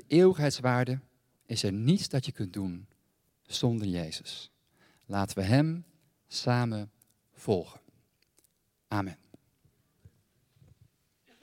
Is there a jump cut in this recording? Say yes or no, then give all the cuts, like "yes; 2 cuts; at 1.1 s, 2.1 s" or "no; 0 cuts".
no; 0 cuts